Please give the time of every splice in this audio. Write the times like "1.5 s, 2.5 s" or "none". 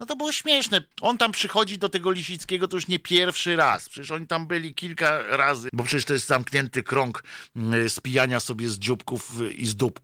0.9 s, 5.7 s